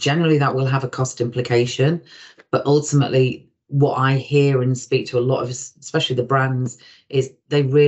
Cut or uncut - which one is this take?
uncut